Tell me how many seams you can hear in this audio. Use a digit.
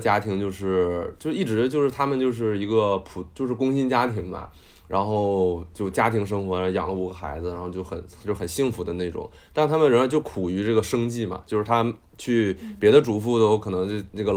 0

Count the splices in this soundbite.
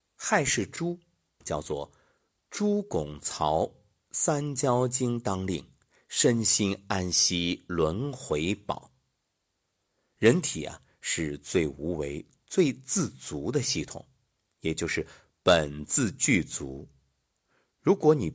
1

